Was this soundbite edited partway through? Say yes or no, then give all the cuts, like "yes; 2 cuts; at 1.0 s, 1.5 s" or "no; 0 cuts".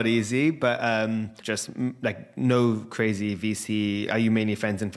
yes; 2 cuts; at 1.4 s, 4.1 s